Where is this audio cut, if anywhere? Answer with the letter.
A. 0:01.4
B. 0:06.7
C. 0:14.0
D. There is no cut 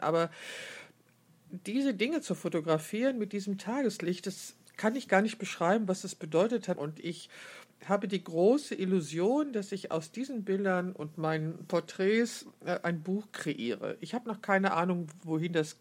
B